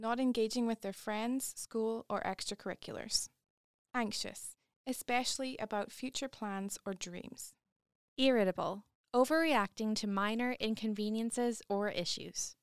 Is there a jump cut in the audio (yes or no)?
yes